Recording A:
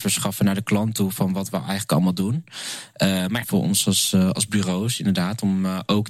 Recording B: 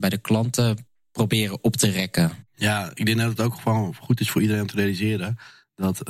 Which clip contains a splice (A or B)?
A